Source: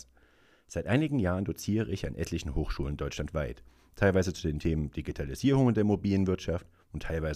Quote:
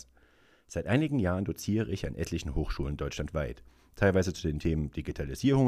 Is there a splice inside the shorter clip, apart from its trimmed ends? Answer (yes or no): no